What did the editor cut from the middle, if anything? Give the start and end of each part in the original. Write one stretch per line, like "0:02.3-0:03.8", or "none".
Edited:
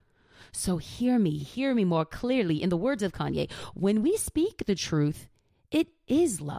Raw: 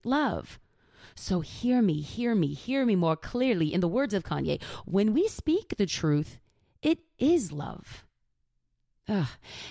0:02.0-0:02.5